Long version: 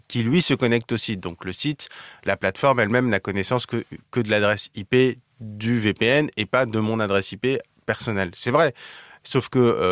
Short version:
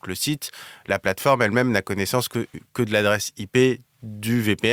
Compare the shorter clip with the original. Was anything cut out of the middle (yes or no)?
no